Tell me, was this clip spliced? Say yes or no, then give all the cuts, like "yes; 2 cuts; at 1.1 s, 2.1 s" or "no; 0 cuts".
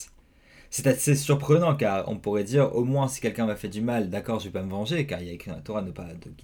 no; 0 cuts